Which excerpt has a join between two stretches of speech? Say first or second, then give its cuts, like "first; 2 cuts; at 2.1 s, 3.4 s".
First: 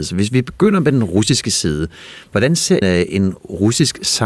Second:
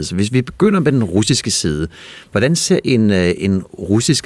first; 1 cut; at 2.8 s